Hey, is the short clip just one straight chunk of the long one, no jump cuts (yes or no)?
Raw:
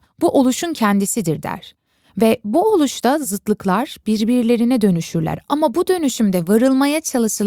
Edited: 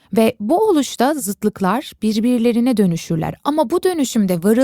yes